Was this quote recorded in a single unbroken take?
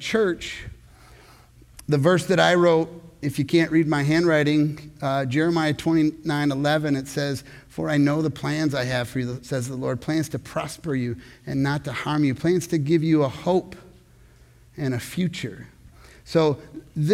yes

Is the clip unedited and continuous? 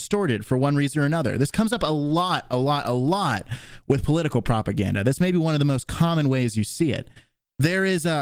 yes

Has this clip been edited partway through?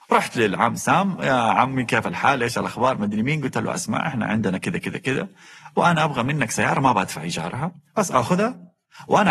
yes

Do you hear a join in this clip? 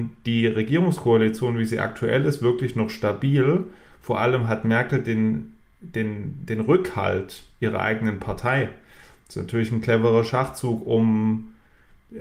no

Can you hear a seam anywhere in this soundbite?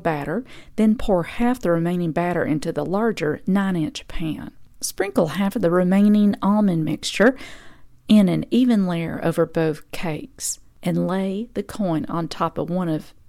yes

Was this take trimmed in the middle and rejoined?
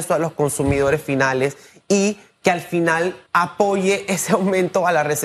yes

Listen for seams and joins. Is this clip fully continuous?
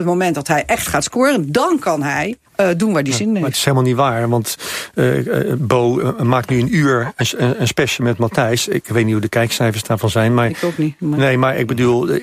no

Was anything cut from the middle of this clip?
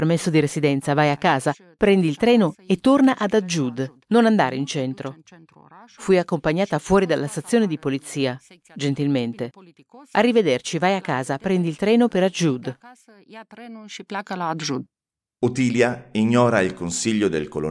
no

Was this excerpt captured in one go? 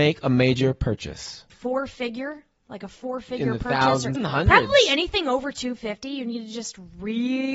no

